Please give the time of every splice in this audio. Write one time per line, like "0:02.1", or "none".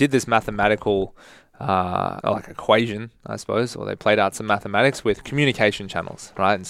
0:02.2